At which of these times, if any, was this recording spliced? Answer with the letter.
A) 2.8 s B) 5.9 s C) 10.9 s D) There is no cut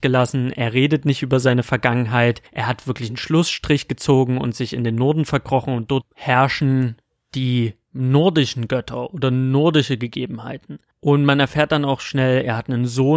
D